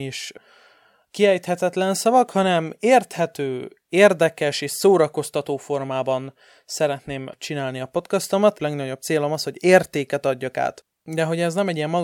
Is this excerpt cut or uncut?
cut